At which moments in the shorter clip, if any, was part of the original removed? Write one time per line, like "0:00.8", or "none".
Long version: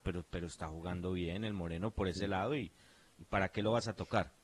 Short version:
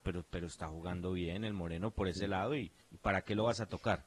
0:02.8